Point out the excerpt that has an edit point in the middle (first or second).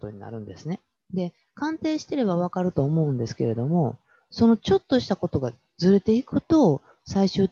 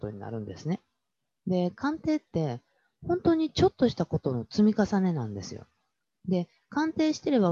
first